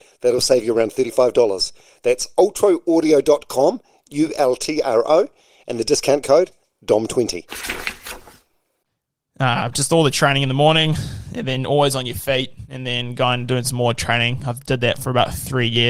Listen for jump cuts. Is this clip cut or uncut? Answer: uncut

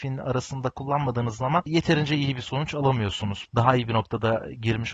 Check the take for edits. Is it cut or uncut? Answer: cut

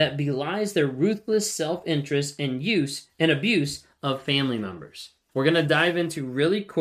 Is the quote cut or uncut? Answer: cut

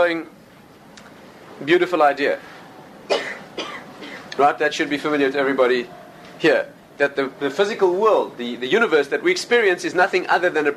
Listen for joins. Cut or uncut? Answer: cut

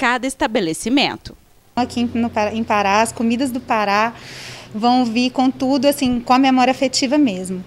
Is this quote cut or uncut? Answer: uncut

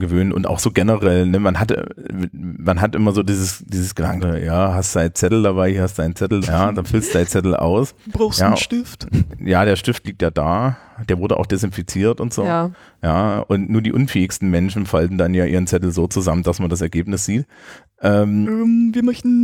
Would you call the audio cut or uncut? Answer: cut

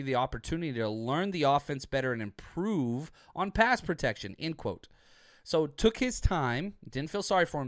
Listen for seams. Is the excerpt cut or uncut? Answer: uncut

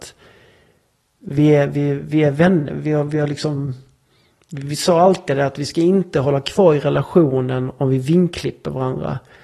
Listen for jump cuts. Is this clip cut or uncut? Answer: uncut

